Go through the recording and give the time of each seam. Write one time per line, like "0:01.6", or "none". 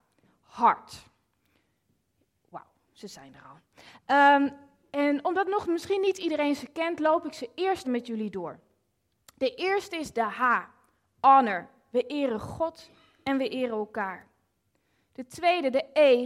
0:07.8